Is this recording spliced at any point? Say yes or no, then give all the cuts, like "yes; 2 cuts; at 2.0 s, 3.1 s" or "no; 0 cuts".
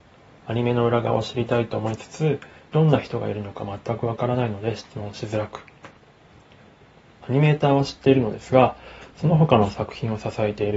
no; 0 cuts